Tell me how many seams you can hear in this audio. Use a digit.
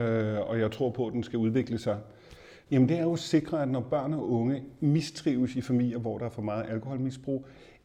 1